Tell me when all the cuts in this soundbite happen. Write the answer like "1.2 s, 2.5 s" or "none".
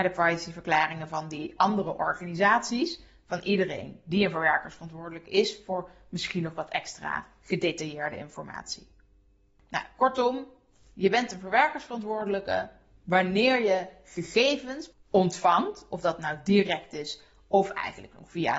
14.9 s